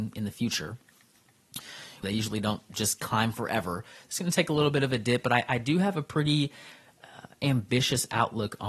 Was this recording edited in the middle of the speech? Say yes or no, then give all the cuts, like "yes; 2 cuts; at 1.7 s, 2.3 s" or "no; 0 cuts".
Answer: yes; 1 cut; at 2.0 s